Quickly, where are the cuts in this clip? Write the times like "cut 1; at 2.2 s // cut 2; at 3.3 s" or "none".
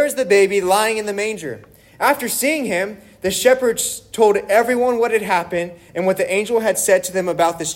none